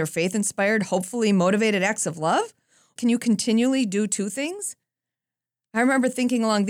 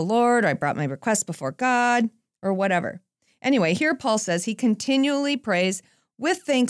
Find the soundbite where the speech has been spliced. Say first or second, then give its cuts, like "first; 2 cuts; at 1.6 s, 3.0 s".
first; 1 cut; at 3.0 s